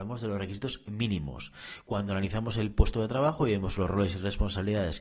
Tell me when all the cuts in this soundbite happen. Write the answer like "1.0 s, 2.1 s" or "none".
none